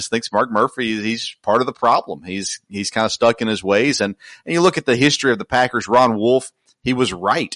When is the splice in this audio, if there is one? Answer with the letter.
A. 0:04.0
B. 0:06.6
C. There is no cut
C